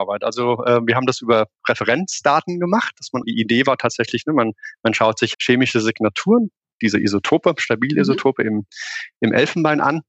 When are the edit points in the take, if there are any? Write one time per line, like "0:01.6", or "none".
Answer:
0:03.2
0:05.3

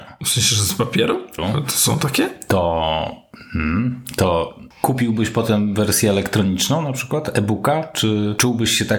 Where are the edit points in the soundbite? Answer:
0:01.4

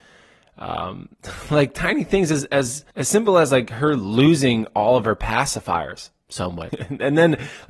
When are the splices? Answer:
0:02.9
0:06.7

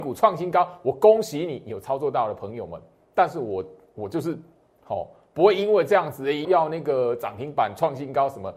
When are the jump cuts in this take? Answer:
0:06.4

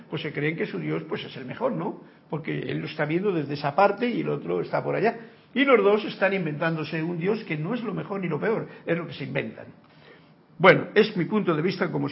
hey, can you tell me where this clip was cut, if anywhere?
none

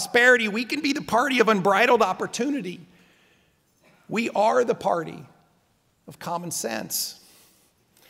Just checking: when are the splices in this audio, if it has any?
none

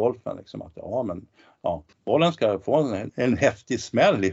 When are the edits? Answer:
0:01.9
0:03.1

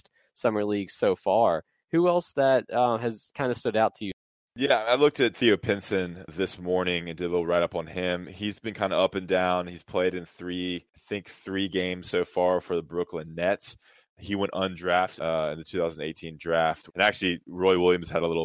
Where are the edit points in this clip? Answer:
0:15.2
0:16.9

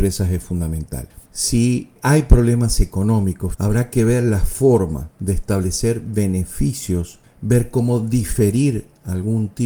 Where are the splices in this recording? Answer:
0:01.2
0:03.5

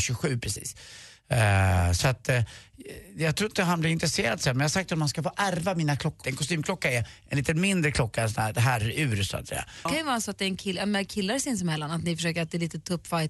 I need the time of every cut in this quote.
0:06.2
0:09.9

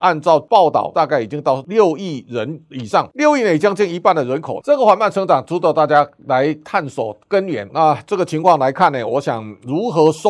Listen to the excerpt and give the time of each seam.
0:04.6
0:07.7

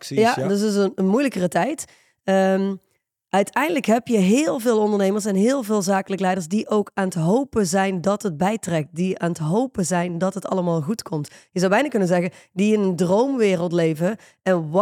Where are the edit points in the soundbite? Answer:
none

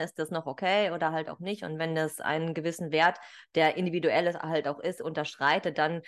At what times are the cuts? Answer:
none

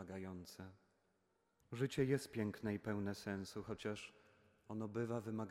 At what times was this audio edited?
0:01.6

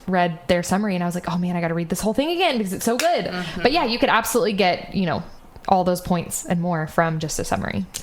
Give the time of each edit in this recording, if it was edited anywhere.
none

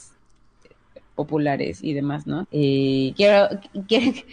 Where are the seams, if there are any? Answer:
0:02.4

